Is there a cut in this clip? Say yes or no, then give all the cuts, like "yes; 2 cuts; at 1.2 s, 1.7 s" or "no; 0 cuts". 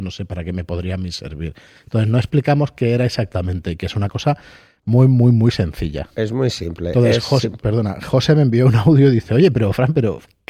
no; 0 cuts